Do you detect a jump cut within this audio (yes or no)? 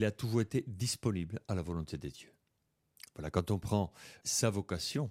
yes